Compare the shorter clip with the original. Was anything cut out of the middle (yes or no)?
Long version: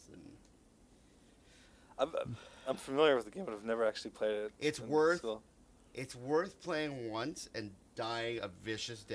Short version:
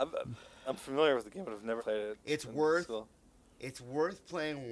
yes